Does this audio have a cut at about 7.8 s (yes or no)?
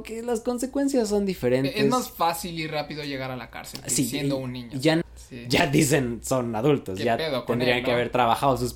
no